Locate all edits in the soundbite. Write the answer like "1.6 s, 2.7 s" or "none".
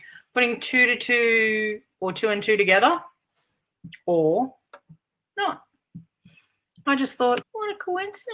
7.4 s